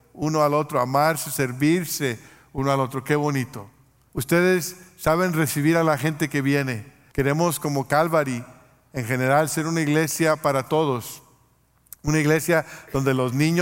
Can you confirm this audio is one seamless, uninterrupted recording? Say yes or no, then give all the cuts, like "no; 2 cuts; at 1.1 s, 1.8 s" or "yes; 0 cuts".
no; 2 cuts; at 4.1 s, 7.1 s